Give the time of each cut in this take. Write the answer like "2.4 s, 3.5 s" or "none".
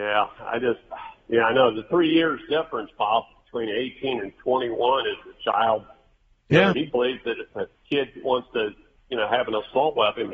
6.7 s